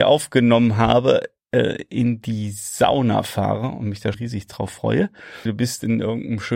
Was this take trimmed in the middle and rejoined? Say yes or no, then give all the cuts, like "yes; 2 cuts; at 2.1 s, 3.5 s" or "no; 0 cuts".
yes; 2 cuts; at 4.1 s, 5.5 s